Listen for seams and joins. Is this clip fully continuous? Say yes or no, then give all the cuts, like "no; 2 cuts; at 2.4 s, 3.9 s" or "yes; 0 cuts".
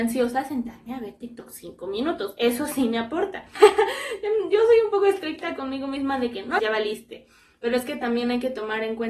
no; 2 cuts; at 3.6 s, 6.6 s